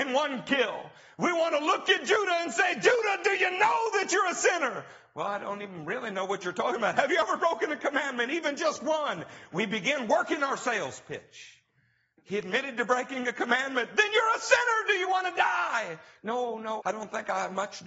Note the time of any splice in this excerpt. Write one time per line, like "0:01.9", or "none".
0:16.8